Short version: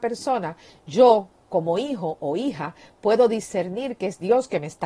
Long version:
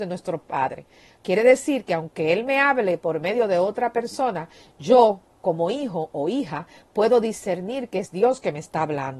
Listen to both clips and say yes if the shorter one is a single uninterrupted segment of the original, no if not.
yes